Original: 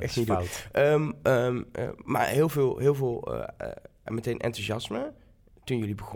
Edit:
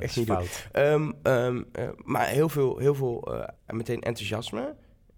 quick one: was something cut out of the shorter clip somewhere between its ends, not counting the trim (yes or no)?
yes